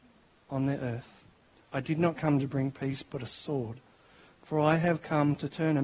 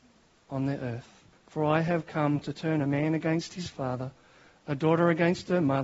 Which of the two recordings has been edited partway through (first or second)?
second